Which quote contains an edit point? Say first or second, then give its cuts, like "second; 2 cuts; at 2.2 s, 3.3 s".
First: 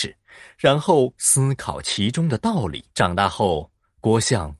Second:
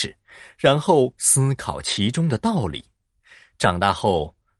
first; 1 cut; at 2.9 s